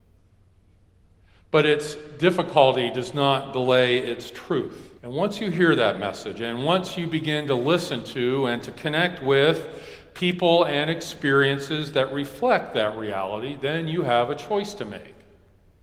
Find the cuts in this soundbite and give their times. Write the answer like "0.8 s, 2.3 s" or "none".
5.0 s

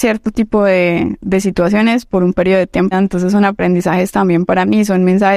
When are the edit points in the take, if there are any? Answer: 2.9 s

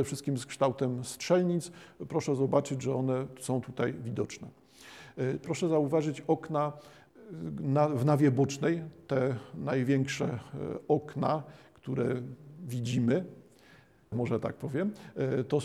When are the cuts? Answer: 5.4 s, 14.1 s

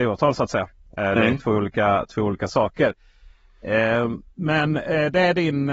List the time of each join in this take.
4.3 s

